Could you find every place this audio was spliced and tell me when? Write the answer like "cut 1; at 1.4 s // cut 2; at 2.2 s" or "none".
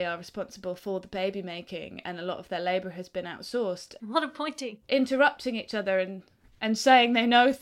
cut 1; at 4.0 s